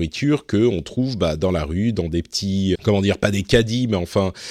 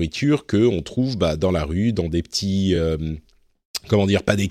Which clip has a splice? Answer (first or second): first